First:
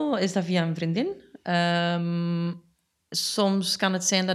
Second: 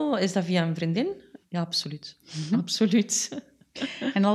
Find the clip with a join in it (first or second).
second